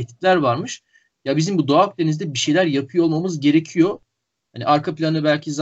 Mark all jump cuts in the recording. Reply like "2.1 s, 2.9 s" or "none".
4.4 s